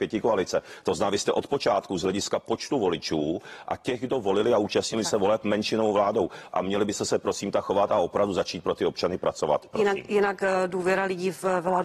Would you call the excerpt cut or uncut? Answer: uncut